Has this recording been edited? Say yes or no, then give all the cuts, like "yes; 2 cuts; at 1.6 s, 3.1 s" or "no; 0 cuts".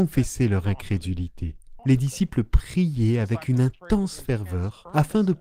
yes; 1 cut; at 1.8 s